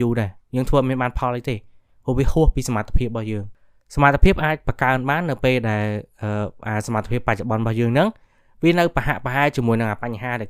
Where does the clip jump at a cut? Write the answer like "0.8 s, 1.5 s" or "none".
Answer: none